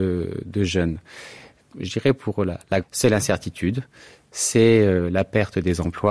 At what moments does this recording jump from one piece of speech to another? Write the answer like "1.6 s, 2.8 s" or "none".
2.8 s